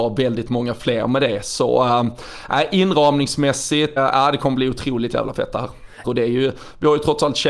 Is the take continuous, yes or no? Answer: no